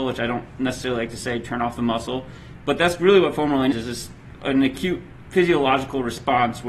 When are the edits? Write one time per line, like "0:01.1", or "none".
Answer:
0:03.7